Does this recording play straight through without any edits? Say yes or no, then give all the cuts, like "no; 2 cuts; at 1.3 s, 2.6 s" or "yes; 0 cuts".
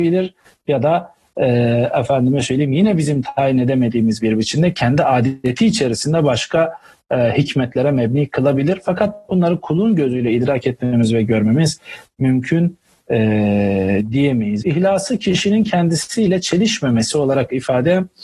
no; 1 cut; at 14.6 s